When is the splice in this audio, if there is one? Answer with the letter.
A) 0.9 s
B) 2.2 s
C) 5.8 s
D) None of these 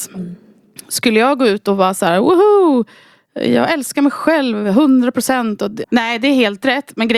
C